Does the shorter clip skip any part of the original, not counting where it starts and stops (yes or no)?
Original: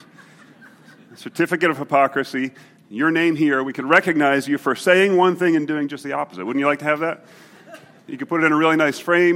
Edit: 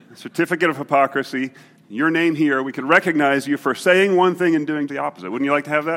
yes